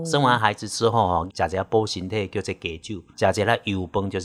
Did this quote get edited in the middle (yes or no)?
yes